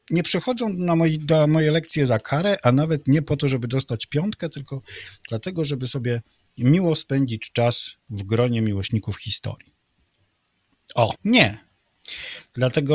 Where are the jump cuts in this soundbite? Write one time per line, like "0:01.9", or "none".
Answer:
0:11.1